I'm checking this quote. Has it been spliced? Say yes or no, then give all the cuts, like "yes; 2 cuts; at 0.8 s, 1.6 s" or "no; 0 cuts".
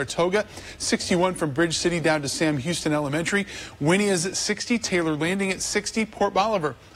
no; 0 cuts